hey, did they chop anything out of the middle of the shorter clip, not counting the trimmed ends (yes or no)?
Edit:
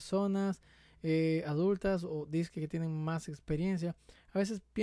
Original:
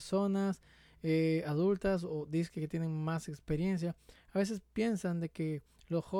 no